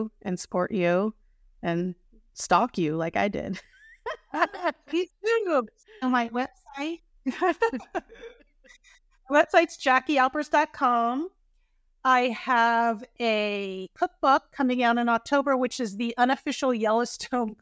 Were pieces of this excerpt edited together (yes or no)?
no